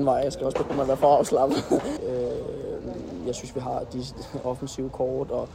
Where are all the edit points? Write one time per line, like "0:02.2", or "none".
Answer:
0:02.0